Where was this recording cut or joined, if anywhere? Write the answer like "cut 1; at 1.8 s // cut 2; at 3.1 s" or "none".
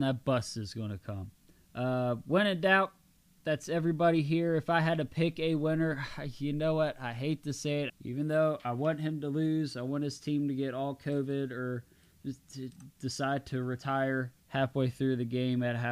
cut 1; at 7.9 s // cut 2; at 14.4 s